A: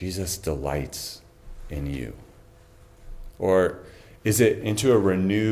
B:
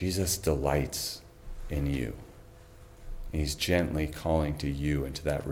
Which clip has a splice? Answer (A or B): A